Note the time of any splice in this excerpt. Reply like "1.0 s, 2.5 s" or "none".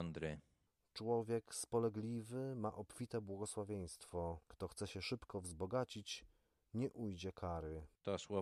none